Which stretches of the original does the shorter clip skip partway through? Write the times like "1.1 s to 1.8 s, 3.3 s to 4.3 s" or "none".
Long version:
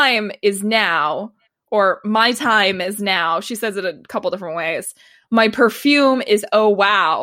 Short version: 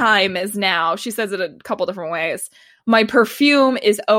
none